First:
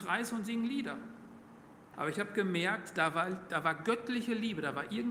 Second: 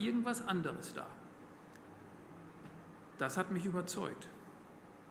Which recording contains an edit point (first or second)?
first